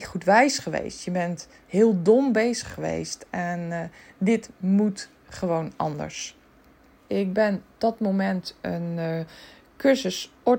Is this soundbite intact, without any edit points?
no; 1 cut; at 7.1 s

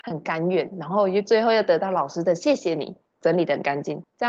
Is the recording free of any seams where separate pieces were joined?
no; 1 cut; at 3.1 s

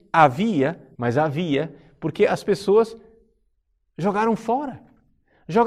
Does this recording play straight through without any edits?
no; 1 cut; at 0.9 s

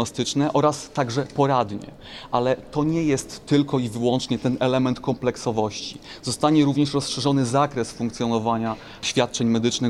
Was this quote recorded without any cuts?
yes; 0 cuts

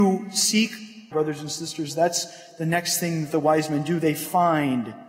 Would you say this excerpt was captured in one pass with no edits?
no; 1 cut; at 1.1 s

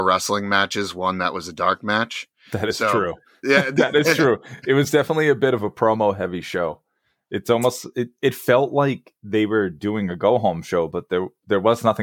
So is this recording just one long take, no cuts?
yes; 0 cuts

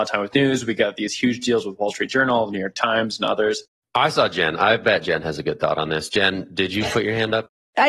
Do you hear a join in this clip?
yes; 1 cut; at 3.7 s

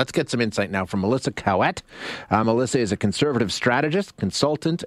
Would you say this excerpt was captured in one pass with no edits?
yes; 0 cuts

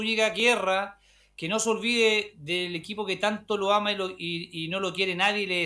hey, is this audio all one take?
yes; 0 cuts

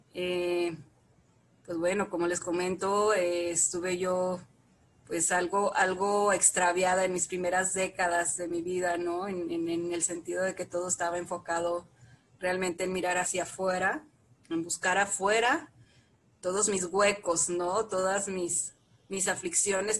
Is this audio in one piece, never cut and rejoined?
yes; 0 cuts

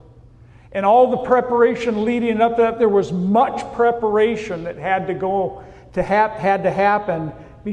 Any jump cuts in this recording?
no; 0 cuts

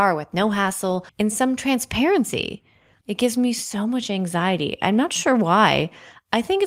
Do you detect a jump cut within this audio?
yes; 2 cuts; at 1.1 s, 3.0 s

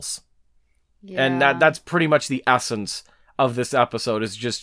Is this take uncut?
yes; 0 cuts

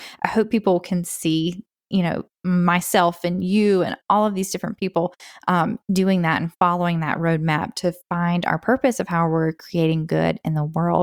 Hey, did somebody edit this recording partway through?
yes; 1 cut; at 2.3 s

